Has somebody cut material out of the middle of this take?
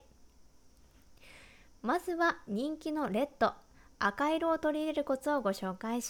no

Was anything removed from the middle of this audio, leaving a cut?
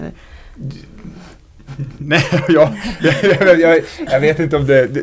no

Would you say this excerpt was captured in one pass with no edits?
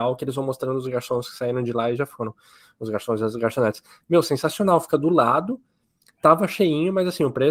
yes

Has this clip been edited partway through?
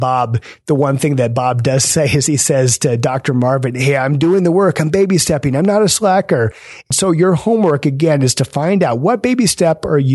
no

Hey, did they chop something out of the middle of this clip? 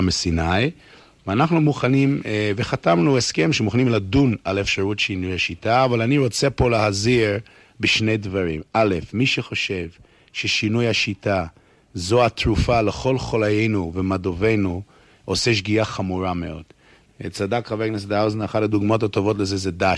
no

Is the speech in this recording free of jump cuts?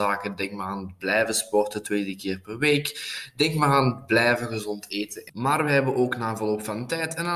yes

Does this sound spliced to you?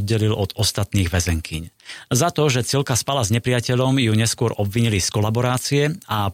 no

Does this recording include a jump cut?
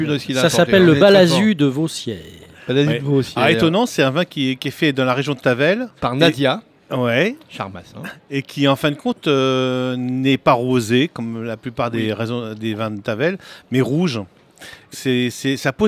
yes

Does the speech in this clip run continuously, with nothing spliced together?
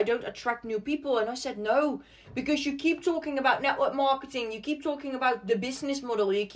yes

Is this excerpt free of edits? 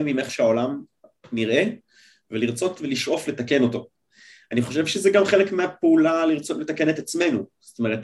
yes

